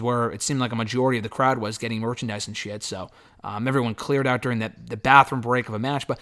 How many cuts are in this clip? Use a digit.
0